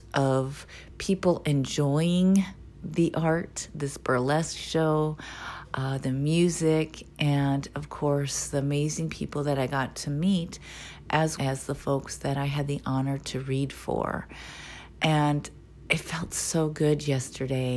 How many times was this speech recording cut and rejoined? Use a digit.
1